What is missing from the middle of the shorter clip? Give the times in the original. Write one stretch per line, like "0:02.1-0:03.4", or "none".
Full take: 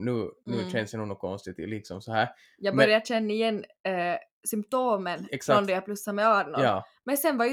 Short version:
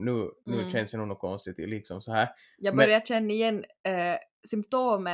none